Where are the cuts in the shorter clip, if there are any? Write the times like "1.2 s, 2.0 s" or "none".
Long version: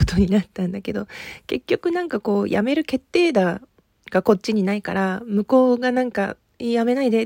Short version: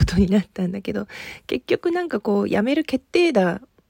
none